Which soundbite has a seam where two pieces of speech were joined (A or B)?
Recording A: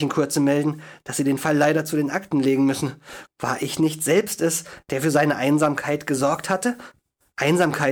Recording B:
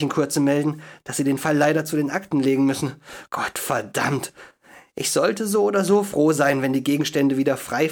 A